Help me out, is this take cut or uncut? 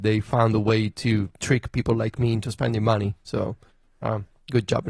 uncut